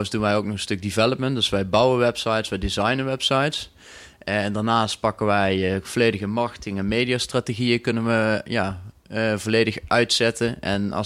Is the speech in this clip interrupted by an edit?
no; 0 cuts

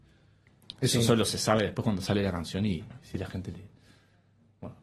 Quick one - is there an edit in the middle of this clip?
no; 0 cuts

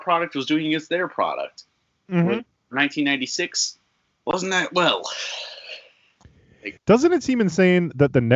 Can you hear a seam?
yes; 1 cut; at 6.8 s

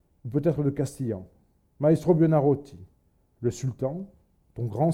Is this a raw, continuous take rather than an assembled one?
no; 1 cut; at 1.6 s

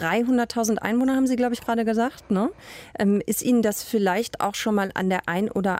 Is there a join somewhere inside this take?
no; 0 cuts

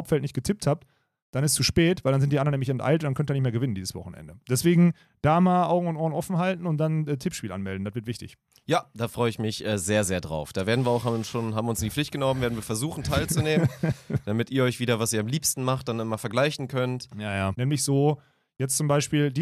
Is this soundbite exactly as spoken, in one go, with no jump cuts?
no; 1 cut; at 17.5 s

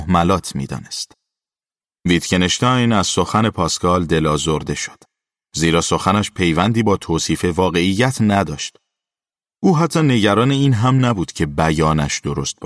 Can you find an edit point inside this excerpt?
no; 0 cuts

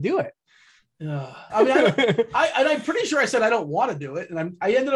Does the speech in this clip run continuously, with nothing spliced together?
no; 1 cut; at 1.5 s

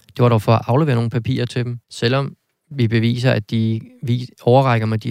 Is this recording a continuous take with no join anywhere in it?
no; 1 cut; at 1.8 s

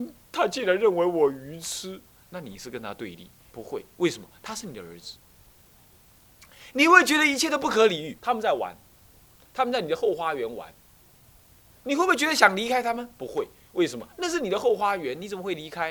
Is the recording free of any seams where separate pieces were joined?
no; 2 cuts; at 3.5 s, 8.2 s

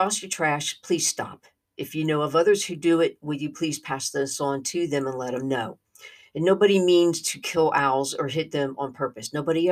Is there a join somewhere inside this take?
no; 0 cuts

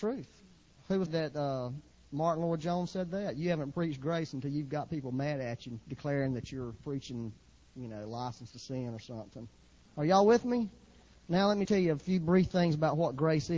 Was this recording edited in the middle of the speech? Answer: yes; 3 cuts; at 1.1 s, 9.9 s, 11.7 s

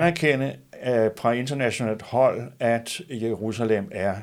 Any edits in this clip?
no; 0 cuts

